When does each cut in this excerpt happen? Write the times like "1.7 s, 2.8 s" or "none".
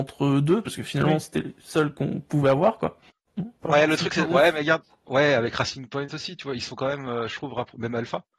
3.6 s